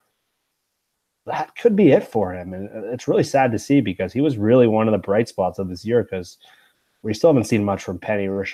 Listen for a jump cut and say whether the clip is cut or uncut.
uncut